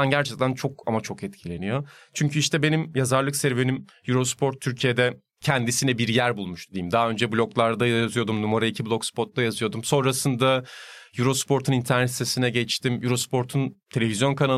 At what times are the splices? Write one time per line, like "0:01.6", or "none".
none